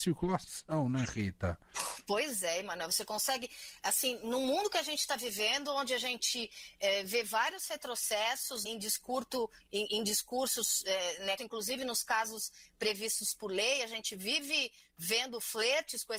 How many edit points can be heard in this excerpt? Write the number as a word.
two